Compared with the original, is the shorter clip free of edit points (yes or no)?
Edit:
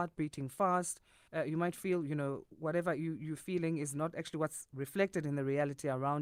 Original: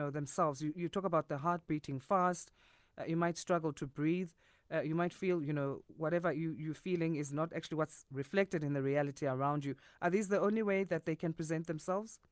no